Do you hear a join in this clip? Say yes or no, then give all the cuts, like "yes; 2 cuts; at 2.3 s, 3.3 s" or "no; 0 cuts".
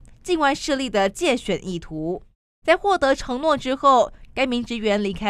yes; 1 cut; at 2.6 s